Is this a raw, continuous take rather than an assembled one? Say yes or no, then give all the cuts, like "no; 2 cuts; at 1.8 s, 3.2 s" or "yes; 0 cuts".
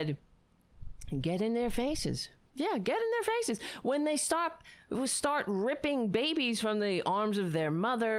yes; 0 cuts